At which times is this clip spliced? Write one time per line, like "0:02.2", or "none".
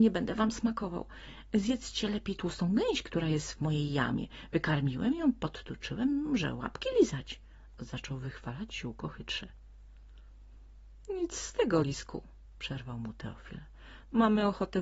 none